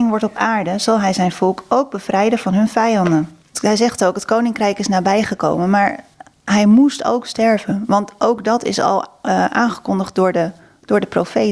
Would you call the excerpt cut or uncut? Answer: cut